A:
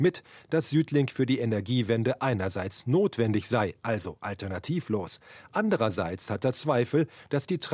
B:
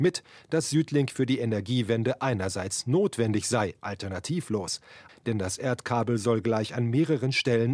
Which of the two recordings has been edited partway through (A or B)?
B